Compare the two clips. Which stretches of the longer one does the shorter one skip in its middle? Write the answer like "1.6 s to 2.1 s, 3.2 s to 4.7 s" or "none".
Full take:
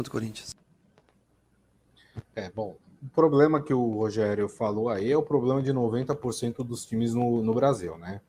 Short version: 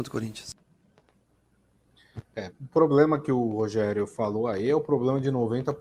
2.5 s to 2.9 s